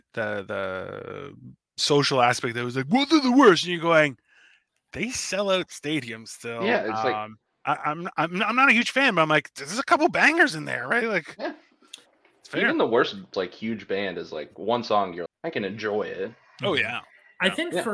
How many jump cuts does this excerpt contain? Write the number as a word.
two